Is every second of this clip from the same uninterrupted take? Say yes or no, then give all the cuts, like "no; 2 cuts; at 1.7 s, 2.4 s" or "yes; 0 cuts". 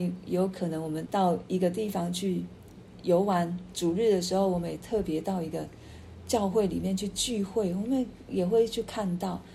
no; 1 cut; at 1.1 s